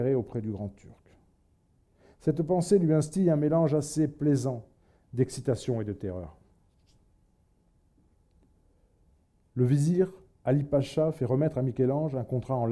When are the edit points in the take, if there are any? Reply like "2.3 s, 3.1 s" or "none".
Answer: none